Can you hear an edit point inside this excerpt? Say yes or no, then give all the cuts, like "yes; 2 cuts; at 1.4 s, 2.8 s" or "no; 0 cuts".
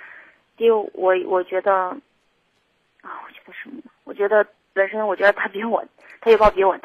no; 0 cuts